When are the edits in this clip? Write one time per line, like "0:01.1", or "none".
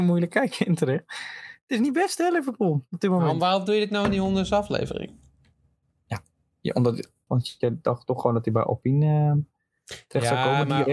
0:07.3